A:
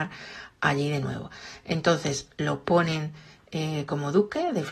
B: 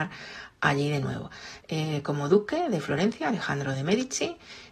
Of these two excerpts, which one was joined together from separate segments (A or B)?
B